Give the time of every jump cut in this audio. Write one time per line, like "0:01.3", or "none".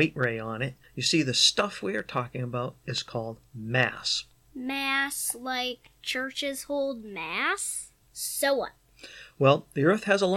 0:08.0

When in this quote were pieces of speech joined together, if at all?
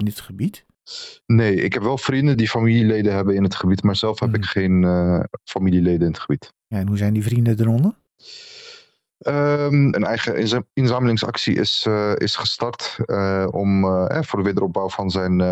0:02.3
0:09.9

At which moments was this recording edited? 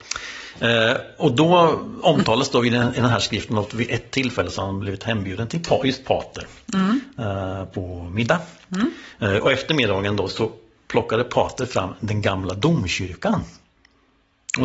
none

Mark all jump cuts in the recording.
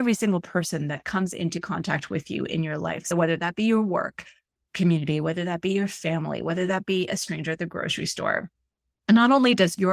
none

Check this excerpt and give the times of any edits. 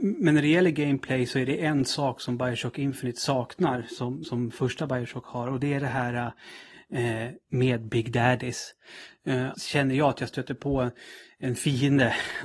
0:04.2
0:09.5

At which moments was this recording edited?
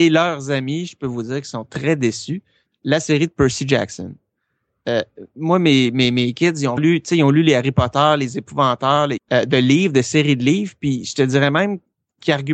0:02.7
0:06.8
0:09.2

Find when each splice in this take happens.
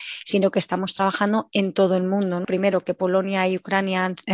0:02.4

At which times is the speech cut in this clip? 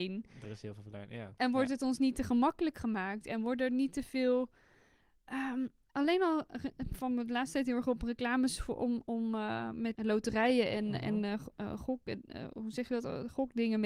0:09.9

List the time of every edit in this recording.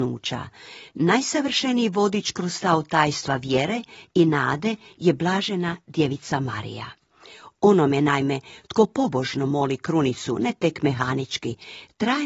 none

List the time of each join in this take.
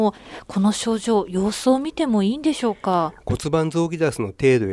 0:03.2

